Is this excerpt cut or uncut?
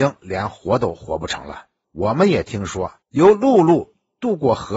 cut